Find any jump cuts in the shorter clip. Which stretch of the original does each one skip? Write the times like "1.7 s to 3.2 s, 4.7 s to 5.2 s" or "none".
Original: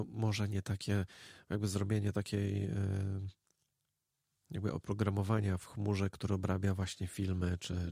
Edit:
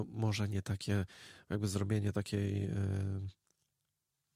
none